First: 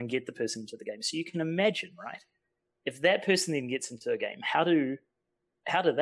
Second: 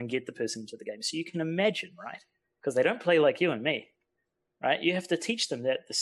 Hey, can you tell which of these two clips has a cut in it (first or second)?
second